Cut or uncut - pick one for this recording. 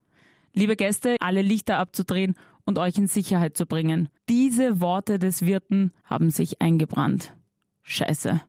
cut